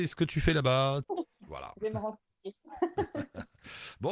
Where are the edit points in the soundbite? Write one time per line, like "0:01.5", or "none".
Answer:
0:01.0